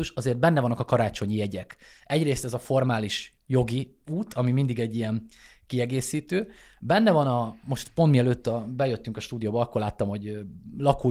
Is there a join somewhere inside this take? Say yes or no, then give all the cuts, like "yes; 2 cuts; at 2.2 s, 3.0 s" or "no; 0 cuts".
no; 0 cuts